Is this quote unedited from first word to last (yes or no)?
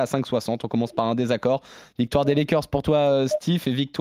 yes